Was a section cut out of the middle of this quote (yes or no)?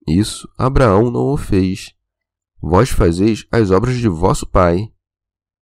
no